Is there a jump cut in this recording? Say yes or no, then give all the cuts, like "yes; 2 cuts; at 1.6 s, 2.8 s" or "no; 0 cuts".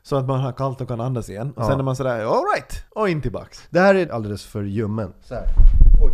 yes; 2 cuts; at 2.9 s, 4.1 s